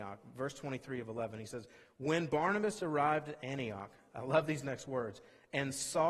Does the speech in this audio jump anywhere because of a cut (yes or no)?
no